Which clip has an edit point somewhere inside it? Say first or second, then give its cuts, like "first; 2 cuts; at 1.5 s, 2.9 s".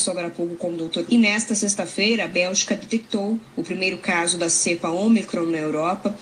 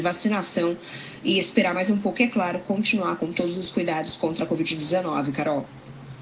first; 1 cut; at 1.1 s